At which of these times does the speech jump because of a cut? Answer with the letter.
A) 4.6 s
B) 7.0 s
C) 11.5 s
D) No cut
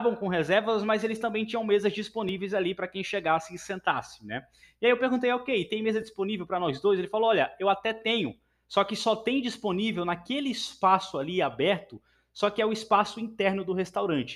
D